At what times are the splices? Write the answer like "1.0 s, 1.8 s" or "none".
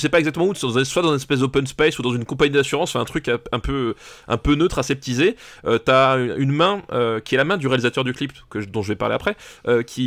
none